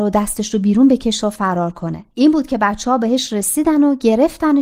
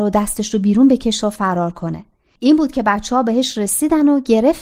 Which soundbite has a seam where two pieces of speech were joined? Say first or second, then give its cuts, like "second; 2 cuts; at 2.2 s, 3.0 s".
first; 1 cut; at 2.1 s